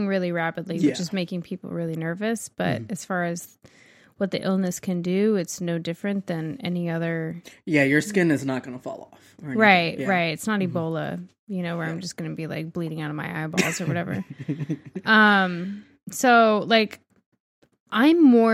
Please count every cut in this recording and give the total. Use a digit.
0